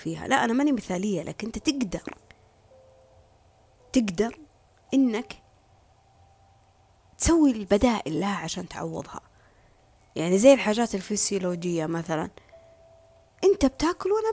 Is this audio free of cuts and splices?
yes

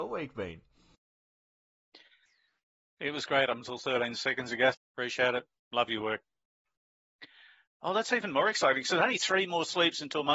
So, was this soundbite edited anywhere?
yes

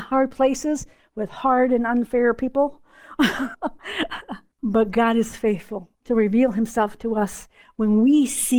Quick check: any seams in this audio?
yes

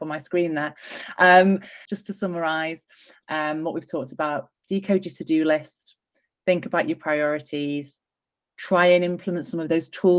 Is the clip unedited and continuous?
no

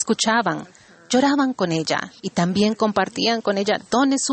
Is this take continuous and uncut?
no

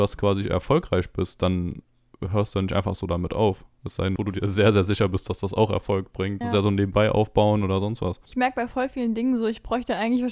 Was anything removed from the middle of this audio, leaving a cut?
yes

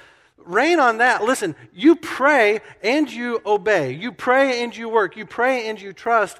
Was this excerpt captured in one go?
yes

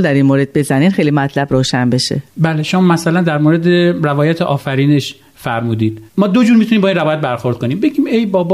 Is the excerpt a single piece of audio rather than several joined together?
no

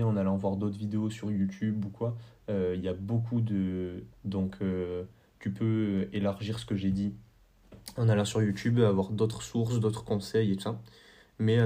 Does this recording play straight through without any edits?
no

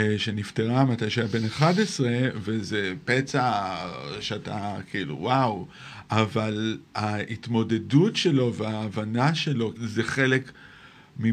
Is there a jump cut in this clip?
yes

